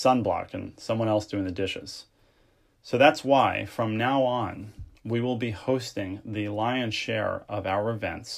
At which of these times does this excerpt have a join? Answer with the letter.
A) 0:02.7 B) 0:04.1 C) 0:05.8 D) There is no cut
A